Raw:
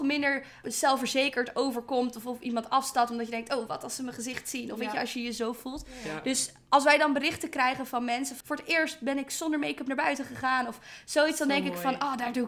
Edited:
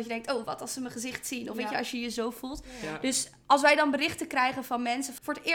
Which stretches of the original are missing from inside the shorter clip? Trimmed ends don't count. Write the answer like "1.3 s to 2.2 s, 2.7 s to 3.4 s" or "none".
none